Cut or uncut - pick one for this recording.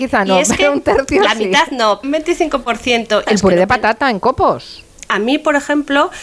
cut